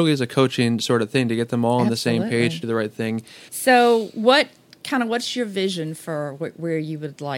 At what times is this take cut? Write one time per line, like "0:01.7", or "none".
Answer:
0:03.5